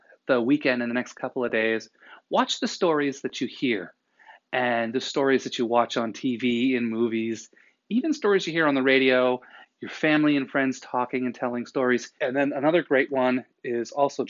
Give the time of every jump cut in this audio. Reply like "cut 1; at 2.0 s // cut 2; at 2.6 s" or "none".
cut 1; at 12.2 s